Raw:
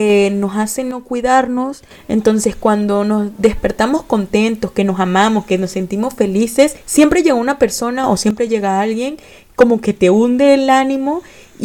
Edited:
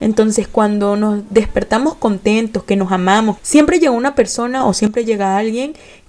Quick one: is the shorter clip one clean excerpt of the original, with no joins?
no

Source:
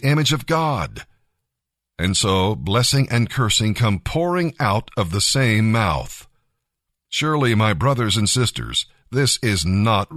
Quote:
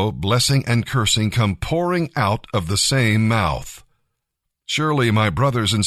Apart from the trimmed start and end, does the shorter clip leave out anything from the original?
no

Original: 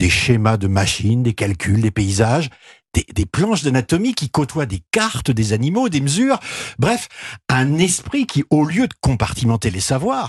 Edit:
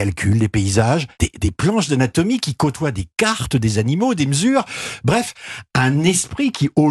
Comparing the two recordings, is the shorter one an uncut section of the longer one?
no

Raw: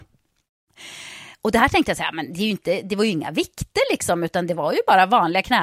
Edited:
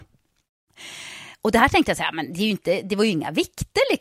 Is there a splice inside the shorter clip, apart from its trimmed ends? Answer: no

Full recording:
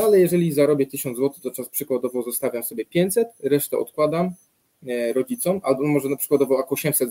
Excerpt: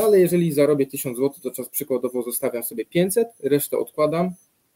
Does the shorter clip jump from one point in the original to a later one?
no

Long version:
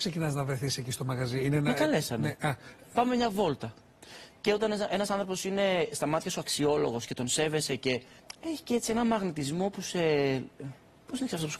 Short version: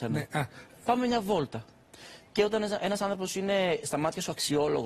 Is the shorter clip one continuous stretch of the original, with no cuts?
yes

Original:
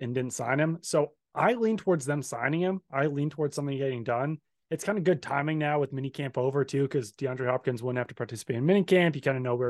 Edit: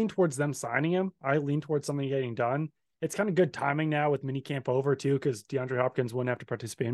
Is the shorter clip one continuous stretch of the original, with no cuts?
yes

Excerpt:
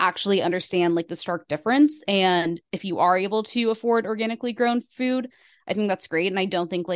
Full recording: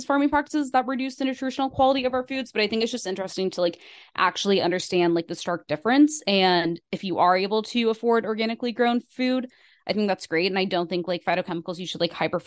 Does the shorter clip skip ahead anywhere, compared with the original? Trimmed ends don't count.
no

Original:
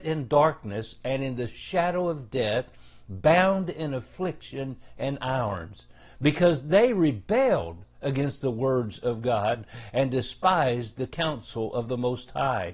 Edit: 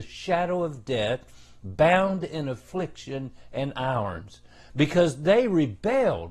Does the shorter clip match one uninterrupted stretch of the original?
yes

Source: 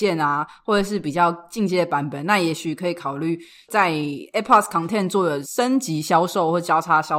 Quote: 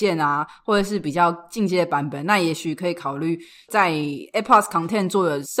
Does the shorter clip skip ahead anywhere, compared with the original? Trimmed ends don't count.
no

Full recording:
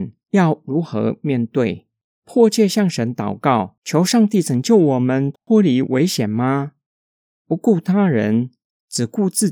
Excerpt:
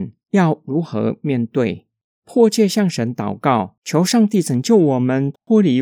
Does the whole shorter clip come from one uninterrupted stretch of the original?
yes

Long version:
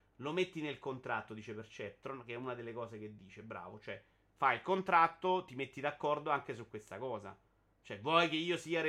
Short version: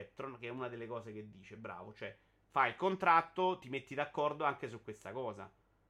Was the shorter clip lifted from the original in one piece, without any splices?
yes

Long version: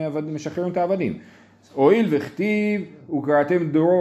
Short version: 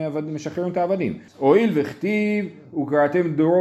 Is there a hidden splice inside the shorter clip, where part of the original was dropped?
yes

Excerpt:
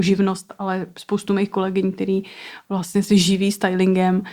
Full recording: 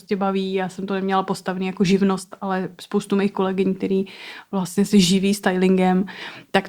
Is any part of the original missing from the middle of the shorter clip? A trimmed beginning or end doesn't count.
no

